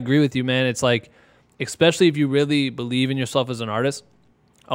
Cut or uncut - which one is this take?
uncut